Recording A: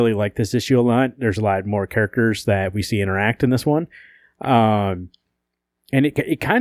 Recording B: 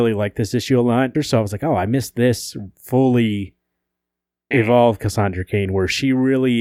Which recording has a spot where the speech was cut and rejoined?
B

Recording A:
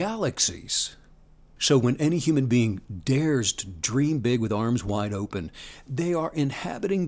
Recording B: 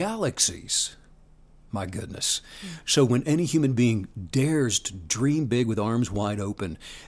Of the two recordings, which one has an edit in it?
A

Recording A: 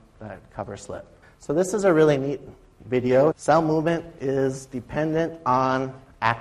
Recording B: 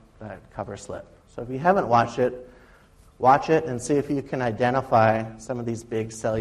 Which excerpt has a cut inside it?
A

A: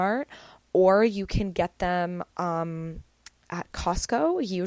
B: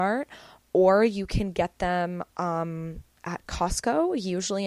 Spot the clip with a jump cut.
B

